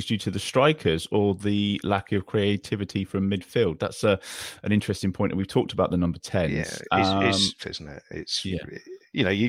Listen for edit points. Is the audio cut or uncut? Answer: cut